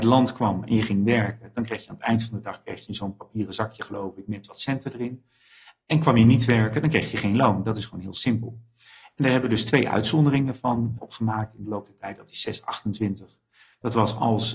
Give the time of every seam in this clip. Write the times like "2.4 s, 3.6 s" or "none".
11.0 s